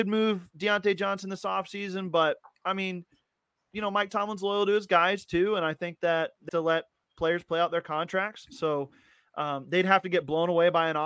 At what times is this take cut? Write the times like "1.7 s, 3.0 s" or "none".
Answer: 6.5 s